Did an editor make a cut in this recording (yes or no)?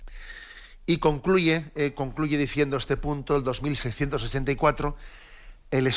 no